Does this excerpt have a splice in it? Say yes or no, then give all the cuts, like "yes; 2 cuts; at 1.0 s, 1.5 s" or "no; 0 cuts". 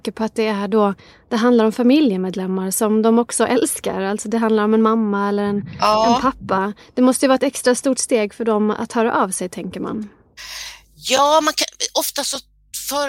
no; 0 cuts